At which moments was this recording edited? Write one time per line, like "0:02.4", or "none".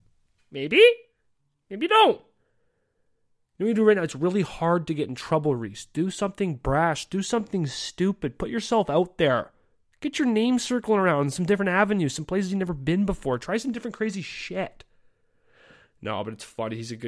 none